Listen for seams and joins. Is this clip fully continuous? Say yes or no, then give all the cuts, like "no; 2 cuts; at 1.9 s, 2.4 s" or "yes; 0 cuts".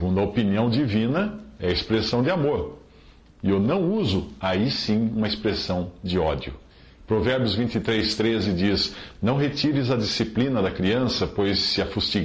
yes; 0 cuts